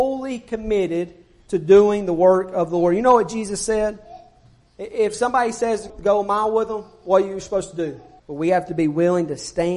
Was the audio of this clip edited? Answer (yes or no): yes